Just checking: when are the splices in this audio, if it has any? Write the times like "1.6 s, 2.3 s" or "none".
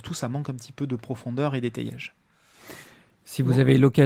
none